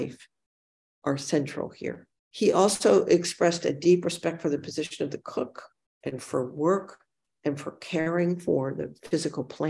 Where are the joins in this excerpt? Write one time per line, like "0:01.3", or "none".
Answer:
0:02.1

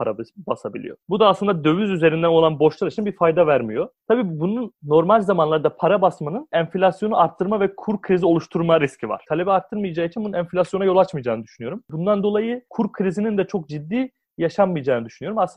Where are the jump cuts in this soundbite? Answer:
0:09.2
0:11.8

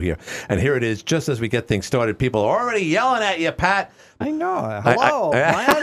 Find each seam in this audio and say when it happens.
0:04.2

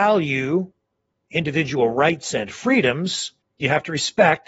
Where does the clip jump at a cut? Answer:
0:03.4

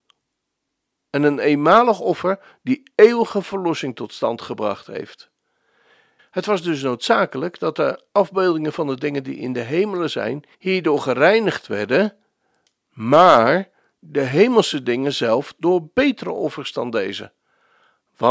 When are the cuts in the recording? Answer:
0:06.2
0:10.5

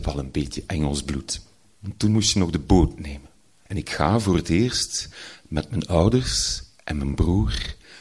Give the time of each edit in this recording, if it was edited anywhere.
0:01.7
0:03.7

